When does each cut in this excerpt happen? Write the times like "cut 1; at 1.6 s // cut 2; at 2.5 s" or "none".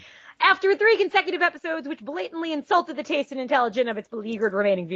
none